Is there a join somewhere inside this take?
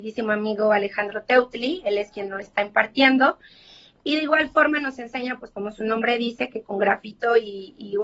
no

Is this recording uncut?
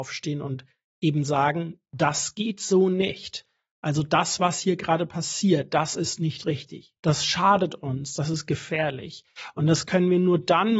no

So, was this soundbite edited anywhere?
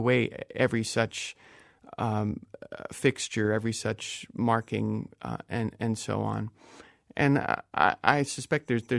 no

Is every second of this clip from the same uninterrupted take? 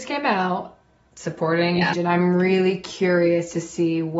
no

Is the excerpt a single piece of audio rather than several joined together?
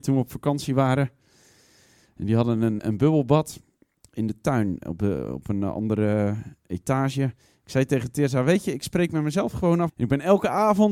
no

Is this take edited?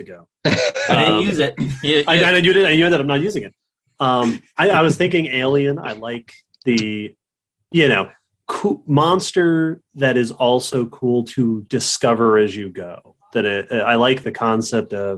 yes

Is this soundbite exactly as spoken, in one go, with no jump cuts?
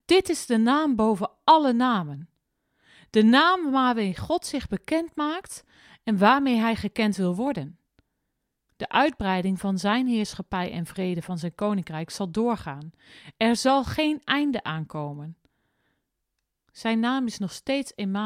no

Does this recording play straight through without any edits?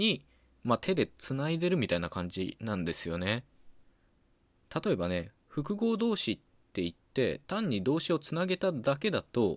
yes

